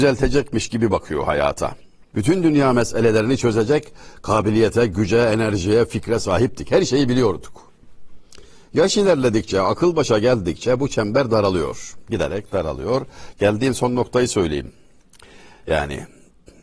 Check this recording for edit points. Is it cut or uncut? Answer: cut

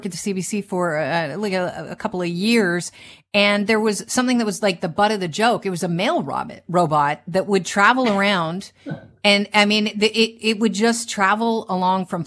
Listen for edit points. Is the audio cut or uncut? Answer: uncut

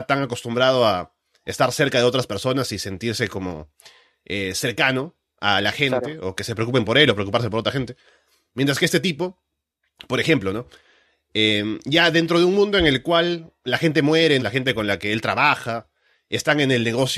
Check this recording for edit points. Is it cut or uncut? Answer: cut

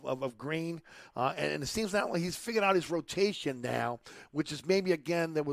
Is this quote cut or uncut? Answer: uncut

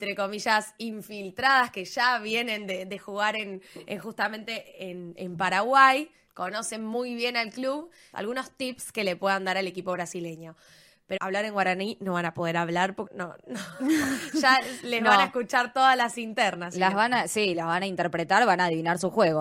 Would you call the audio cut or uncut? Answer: cut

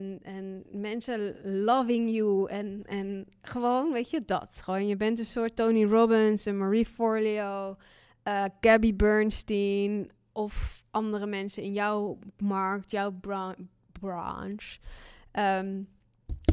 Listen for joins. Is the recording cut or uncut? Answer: uncut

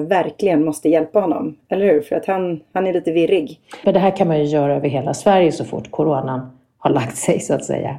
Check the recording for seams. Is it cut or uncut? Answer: cut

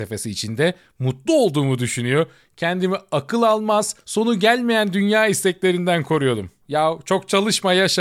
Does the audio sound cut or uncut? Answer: cut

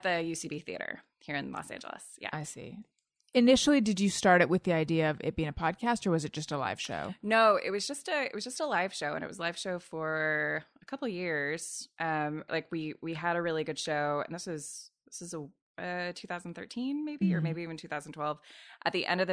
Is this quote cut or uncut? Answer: cut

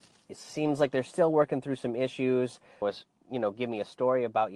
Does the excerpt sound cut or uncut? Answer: cut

